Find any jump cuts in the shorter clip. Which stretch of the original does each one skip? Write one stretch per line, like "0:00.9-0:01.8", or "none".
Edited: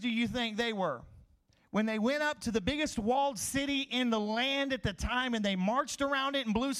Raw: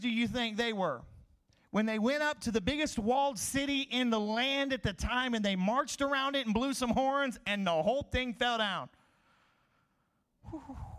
none